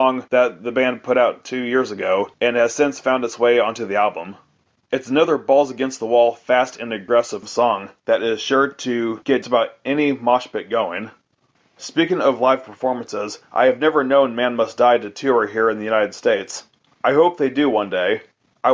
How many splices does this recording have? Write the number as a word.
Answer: one